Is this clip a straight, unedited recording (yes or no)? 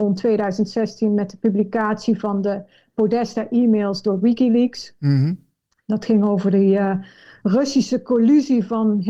yes